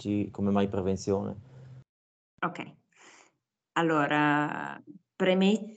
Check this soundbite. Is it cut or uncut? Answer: uncut